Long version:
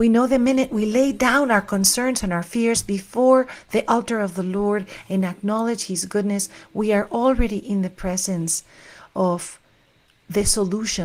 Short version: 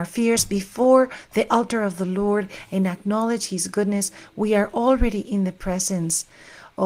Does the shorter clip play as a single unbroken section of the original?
yes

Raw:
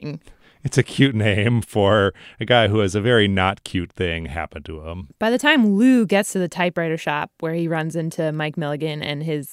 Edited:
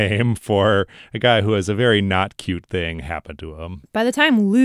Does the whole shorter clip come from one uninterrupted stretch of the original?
yes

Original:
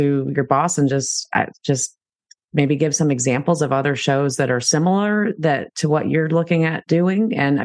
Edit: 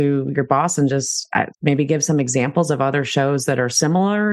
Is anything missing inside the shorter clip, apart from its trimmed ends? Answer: yes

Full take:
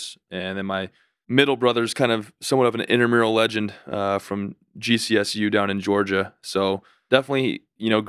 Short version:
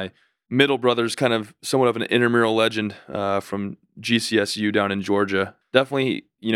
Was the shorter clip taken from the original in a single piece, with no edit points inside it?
no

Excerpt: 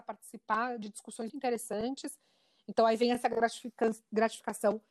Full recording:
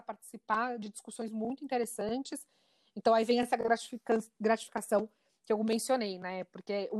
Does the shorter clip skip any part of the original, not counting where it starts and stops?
yes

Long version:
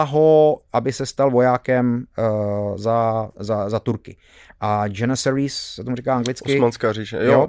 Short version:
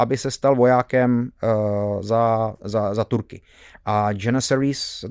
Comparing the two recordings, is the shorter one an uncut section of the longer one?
yes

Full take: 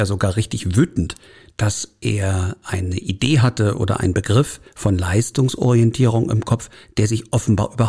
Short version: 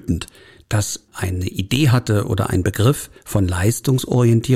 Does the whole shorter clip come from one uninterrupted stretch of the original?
no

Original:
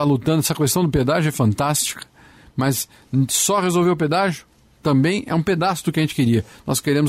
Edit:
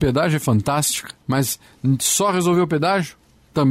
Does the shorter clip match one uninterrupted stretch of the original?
no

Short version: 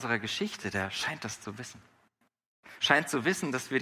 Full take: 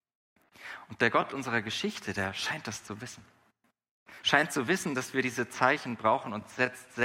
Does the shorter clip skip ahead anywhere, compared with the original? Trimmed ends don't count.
no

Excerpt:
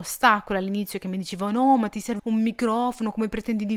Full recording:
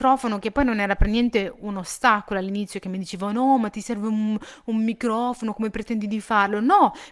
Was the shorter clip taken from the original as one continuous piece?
no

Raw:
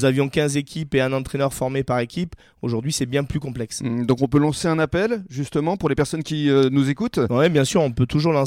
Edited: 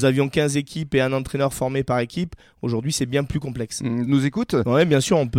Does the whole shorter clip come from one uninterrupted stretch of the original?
no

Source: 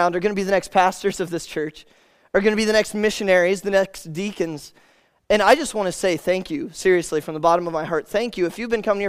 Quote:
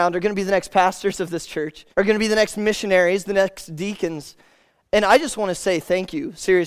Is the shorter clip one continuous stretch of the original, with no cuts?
no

